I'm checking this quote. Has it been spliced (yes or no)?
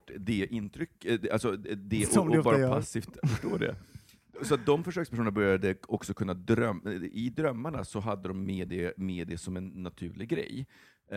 no